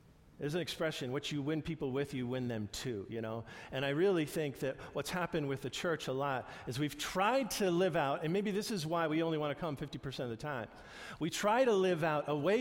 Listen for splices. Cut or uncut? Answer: uncut